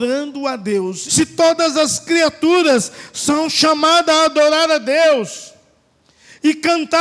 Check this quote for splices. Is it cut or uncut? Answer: cut